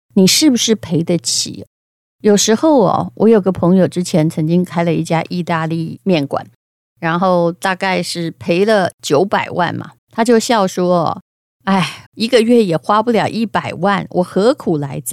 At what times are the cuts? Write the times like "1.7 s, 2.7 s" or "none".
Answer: 10.0 s, 12.1 s